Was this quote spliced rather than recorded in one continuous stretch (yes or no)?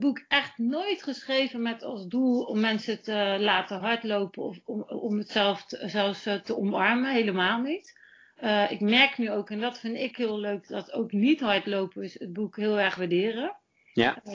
no